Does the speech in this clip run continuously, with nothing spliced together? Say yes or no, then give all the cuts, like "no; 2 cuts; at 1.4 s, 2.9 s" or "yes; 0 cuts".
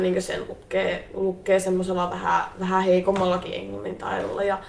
yes; 0 cuts